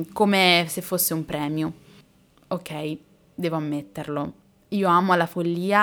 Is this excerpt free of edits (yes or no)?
yes